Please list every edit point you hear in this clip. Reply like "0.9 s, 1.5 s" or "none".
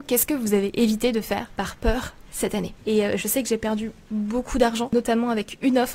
2.8 s

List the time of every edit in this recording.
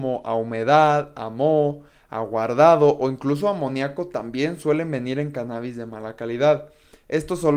none

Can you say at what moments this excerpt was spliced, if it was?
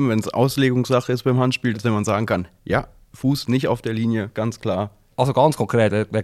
1.7 s, 5.1 s

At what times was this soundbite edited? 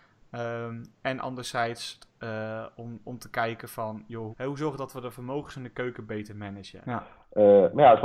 4.3 s, 6.8 s

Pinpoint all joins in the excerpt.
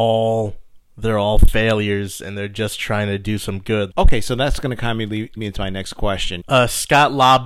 3.9 s, 5.4 s, 6.4 s

